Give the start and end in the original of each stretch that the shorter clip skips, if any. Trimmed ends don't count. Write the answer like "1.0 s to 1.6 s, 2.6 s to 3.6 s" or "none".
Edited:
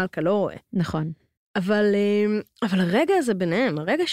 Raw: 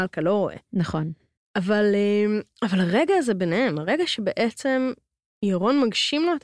none